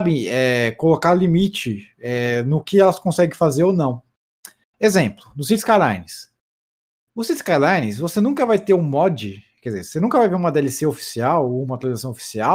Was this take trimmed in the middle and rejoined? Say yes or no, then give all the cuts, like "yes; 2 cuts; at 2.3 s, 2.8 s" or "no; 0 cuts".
no; 0 cuts